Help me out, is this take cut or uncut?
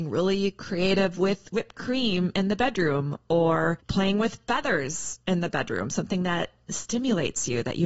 uncut